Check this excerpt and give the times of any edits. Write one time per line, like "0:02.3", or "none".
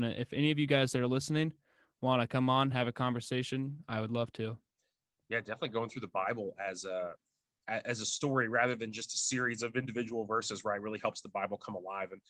none